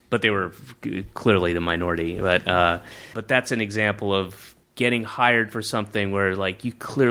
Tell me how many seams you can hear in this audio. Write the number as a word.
two